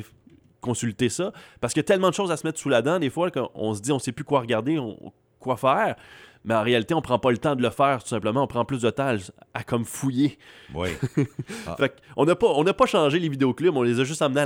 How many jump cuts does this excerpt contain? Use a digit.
0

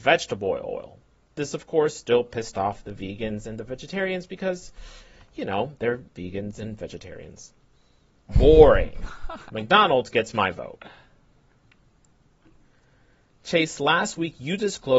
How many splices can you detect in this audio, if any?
1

